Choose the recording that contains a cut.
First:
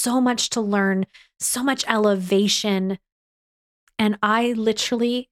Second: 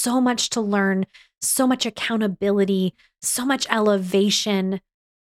first; 2 cuts; at 1.3 s, 3.9 s

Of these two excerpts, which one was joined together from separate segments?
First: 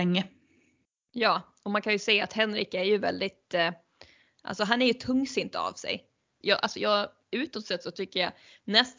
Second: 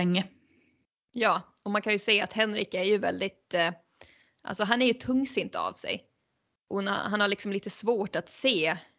first; 1 cut; at 6.4 s

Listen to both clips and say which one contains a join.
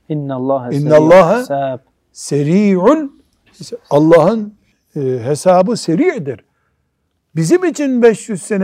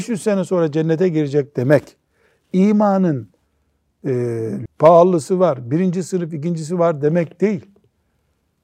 second; 1 cut; at 4.7 s

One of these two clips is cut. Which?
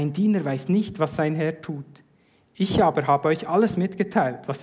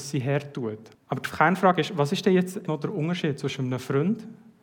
second; 2 cuts; at 0.9 s, 2.7 s

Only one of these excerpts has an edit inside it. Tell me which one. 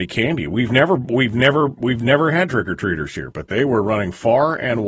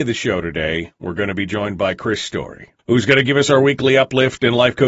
second; 1 cut; at 2.8 s

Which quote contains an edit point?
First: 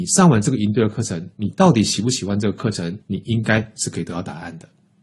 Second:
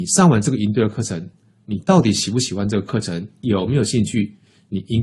first; 2 cuts; at 1.3 s, 3.0 s

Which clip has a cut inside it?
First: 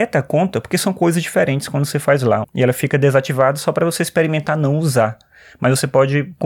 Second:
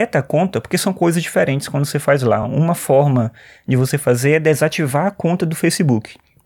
first; 1 cut; at 2.4 s

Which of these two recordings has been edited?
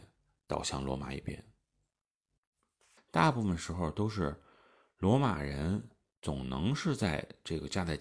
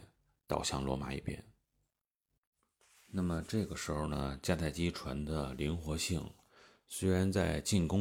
first; 1 cut; at 3.0 s

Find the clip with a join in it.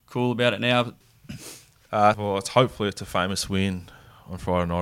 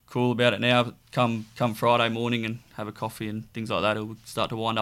first; 2 cuts; at 1.0 s, 2.1 s

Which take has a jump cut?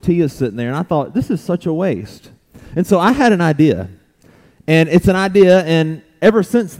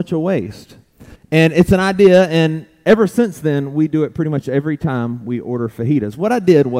second; 1 cut; at 1.1 s

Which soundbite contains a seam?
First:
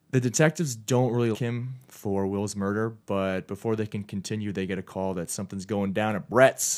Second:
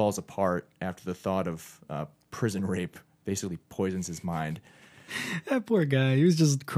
first; 1 cut; at 1.3 s

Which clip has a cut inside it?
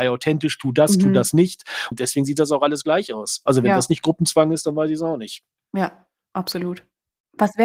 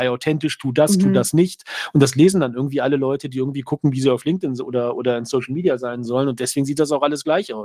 first; 1 cut; at 1.9 s

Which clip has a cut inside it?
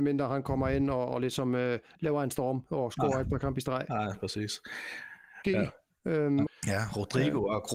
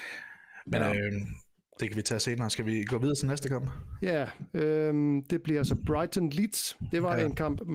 first; 2 cuts; at 5.4 s, 6.5 s

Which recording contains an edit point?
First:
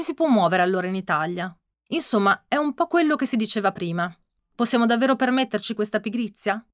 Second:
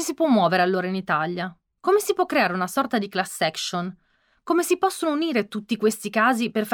first; 1 cut; at 1.7 s

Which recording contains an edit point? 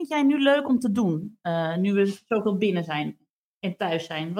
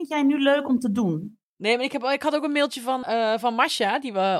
second; 2 cuts; at 1.4 s, 3.0 s

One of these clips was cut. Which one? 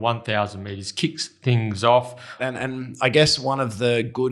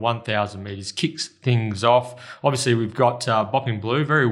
first; 1 cut; at 2.4 s

